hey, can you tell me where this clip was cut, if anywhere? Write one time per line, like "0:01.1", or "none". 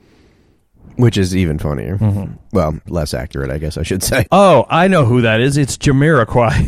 0:02.9
0:04.3